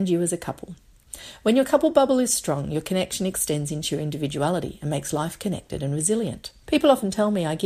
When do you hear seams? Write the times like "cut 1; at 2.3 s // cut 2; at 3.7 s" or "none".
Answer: cut 1; at 6.7 s